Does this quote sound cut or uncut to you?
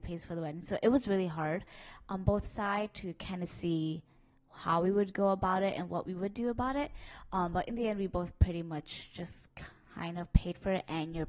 uncut